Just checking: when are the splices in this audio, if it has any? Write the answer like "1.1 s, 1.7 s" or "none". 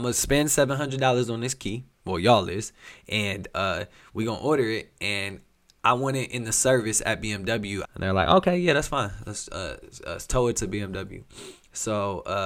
7.8 s

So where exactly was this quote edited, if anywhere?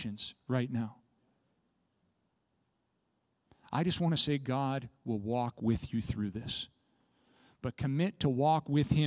none

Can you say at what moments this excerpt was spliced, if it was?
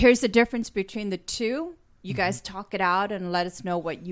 none

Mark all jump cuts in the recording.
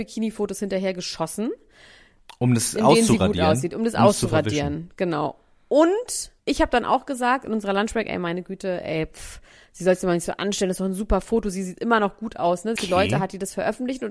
6.4 s, 12.8 s

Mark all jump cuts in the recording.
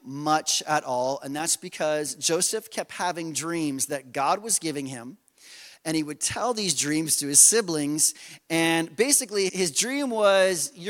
9.5 s

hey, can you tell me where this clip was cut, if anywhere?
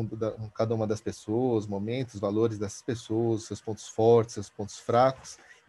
none

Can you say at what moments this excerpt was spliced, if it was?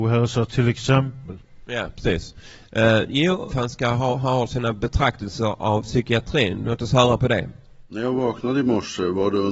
3.5 s, 7.9 s

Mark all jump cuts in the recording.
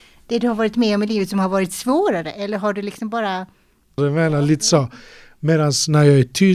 4.0 s

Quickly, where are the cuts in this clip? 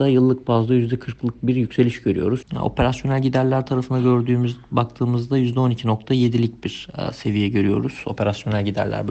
2.4 s

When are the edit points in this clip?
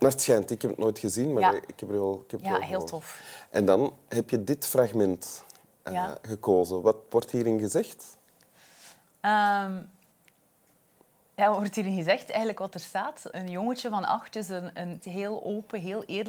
13.3 s, 15.0 s

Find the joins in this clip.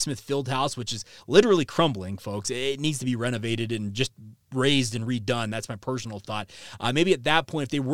none

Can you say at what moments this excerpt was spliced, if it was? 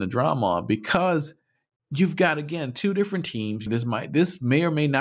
3.7 s

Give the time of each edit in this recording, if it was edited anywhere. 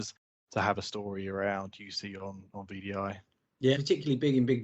3.7 s

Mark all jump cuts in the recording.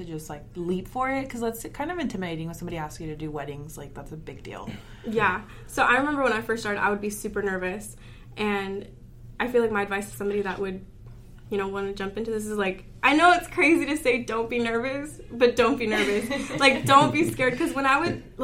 none

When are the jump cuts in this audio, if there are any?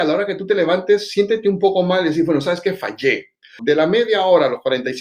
3.6 s

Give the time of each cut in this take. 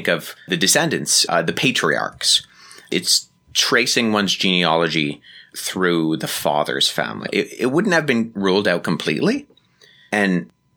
1.3 s, 7.3 s

